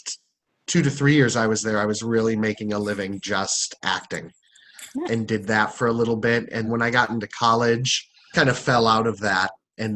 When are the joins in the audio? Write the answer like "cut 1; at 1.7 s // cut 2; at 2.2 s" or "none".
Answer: cut 1; at 5.0 s // cut 2; at 6.6 s // cut 3; at 8.3 s